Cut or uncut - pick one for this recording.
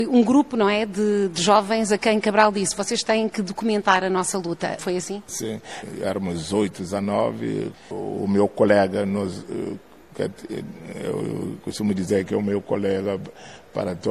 cut